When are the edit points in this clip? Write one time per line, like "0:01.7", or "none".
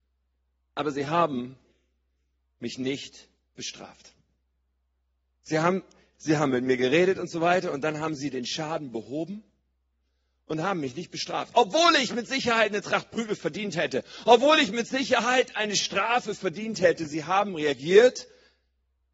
none